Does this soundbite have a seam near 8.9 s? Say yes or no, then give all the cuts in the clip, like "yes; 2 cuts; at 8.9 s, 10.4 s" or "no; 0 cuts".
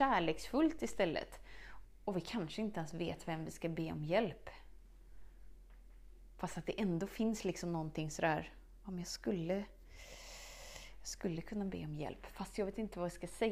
no; 1 cut; at 1.8 s